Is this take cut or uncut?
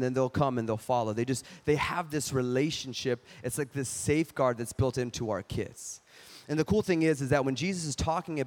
uncut